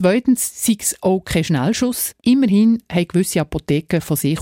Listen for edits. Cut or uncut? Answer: cut